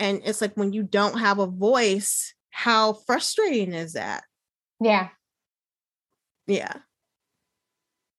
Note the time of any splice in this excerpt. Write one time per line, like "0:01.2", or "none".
0:02.4
0:06.4